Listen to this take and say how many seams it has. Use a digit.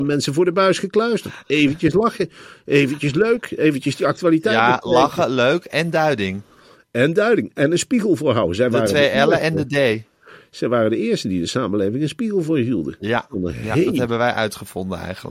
0